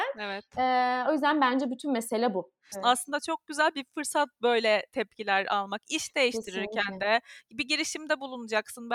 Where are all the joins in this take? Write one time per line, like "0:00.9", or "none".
0:02.7